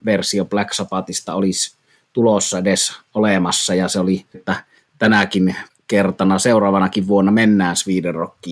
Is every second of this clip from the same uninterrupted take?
no; 1 cut; at 4.3 s

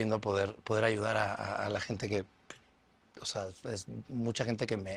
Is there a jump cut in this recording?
no; 0 cuts

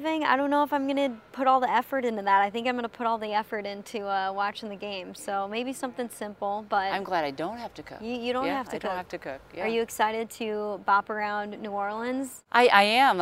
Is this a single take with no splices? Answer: yes; 0 cuts

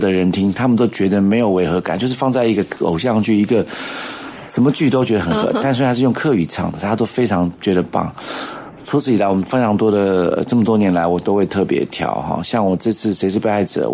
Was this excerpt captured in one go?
yes; 0 cuts

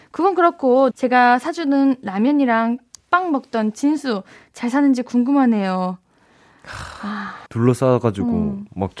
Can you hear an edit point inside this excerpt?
yes; 2 cuts; at 0.9 s, 7.5 s

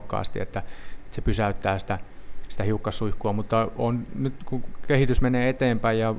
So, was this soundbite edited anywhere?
no; 0 cuts

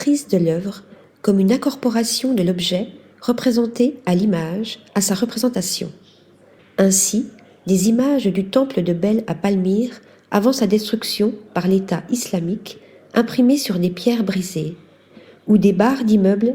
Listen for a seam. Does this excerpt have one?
yes; 1 cut; at 6.6 s

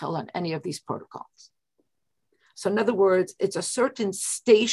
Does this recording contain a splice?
yes; 1 cut; at 3.4 s

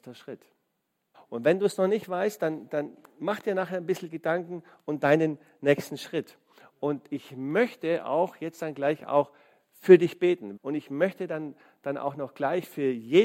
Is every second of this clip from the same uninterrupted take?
no; 2 cuts; at 1.1 s, 10.6 s

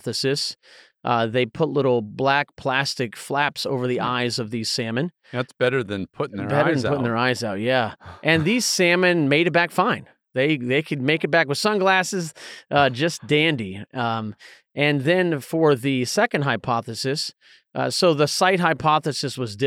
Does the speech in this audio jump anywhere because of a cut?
no; 0 cuts

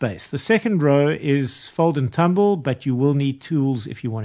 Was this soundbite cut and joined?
no; 0 cuts

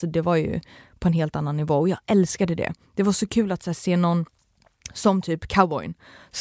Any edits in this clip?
no; 0 cuts

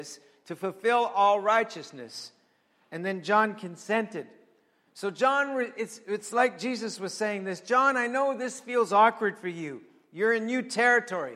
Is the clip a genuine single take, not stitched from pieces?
yes; 0 cuts

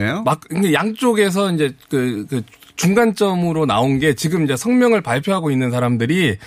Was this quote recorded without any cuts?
yes; 0 cuts

